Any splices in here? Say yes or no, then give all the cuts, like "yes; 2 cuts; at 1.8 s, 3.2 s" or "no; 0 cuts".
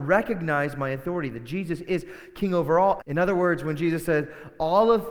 yes; 1 cut; at 3.0 s